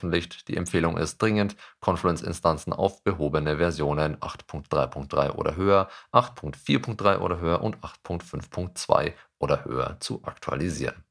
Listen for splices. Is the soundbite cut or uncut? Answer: cut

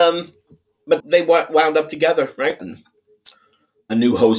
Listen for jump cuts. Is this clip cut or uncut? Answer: cut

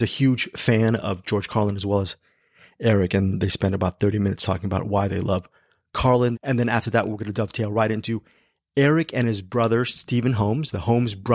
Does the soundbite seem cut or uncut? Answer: cut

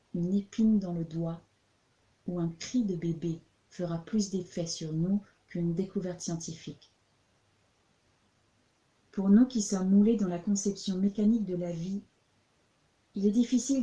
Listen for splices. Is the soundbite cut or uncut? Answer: uncut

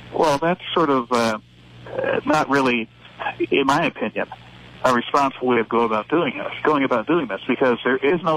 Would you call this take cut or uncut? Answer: uncut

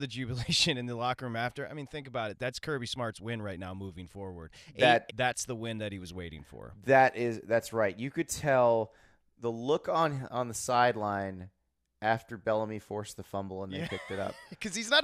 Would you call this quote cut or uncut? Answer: cut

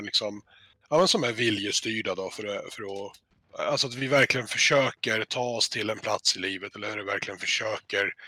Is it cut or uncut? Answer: uncut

